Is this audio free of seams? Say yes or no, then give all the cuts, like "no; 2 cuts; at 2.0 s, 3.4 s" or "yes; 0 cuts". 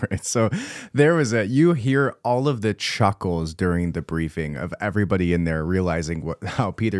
yes; 0 cuts